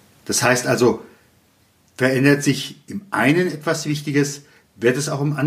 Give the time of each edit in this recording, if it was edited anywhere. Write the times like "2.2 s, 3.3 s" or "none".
none